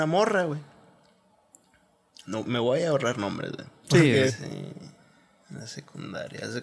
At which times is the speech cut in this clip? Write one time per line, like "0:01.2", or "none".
0:02.4
0:04.3